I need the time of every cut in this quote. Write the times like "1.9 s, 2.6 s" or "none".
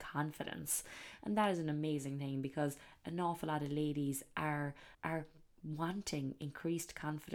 1.2 s, 4.9 s